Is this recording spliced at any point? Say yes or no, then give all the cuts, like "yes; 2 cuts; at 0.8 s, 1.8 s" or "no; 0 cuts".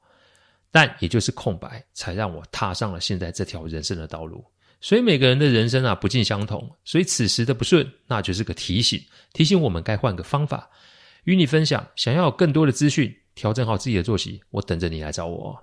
no; 0 cuts